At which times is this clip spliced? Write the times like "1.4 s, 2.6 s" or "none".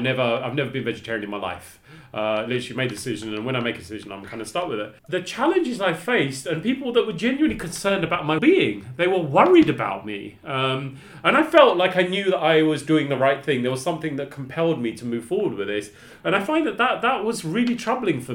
5.0 s, 8.4 s, 16.2 s